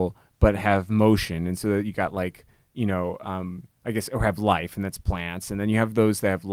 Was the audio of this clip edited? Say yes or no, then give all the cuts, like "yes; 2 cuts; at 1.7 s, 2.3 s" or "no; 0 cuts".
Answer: no; 0 cuts